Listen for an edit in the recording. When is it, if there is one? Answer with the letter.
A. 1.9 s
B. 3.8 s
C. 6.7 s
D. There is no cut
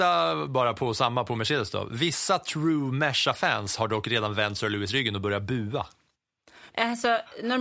C